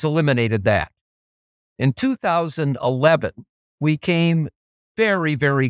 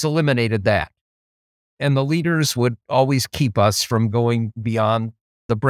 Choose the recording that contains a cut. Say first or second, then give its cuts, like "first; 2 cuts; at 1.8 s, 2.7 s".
second; 1 cut; at 1.7 s